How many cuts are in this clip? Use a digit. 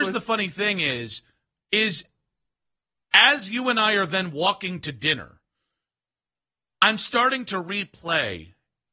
0